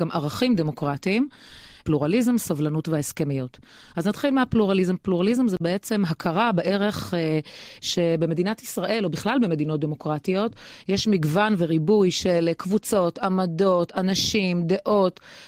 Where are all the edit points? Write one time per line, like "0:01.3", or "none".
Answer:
none